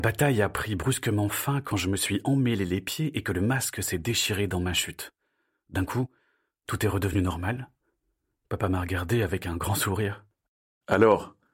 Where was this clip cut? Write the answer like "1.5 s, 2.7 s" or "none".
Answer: none